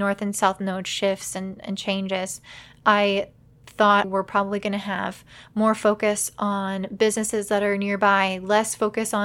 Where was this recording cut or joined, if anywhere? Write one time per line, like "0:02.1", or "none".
0:04.0